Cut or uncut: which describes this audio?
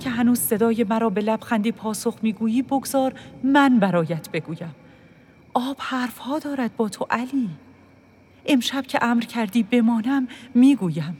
uncut